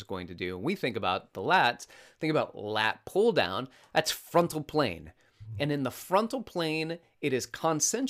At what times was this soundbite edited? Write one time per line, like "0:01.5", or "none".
none